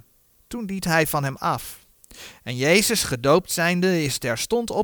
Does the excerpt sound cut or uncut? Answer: uncut